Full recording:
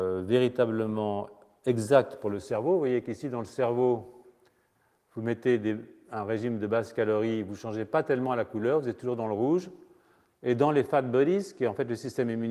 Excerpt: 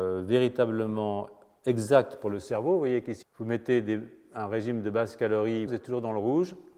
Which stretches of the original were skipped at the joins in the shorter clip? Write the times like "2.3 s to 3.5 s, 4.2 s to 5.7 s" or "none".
3.2 s to 5.0 s, 7.4 s to 8.8 s